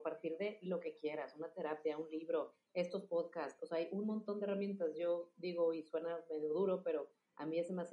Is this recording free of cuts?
yes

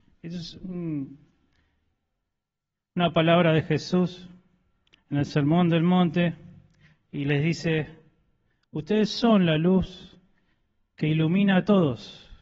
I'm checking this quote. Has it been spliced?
no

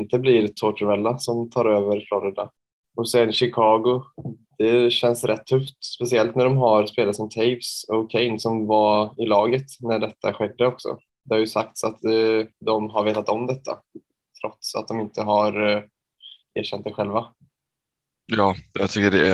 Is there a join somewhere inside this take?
yes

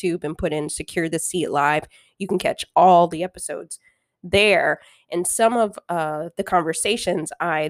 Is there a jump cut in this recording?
no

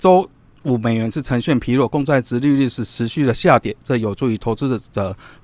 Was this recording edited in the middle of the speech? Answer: no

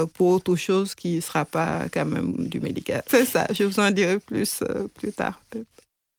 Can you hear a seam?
yes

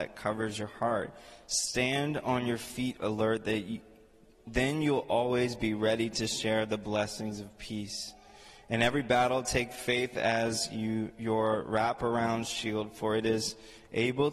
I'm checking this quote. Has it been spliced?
no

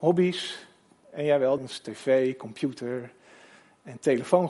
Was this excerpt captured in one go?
no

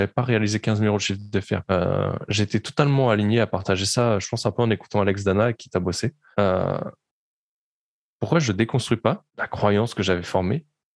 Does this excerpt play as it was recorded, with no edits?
no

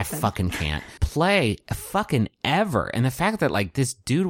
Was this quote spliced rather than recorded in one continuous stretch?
yes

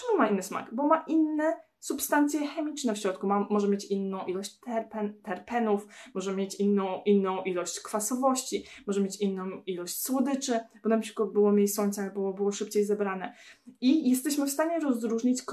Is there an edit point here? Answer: no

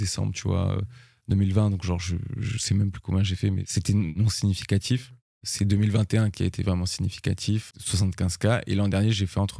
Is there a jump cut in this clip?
yes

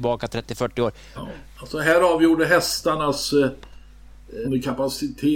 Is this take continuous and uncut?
no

